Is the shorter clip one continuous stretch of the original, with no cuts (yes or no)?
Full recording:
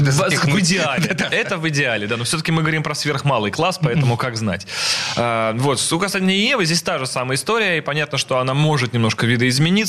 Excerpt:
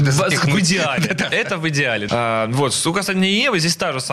no